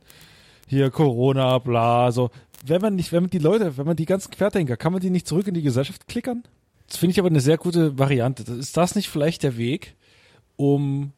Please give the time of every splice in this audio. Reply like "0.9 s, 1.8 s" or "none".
6.7 s